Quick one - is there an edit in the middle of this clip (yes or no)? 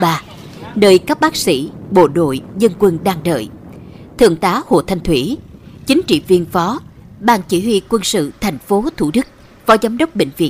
no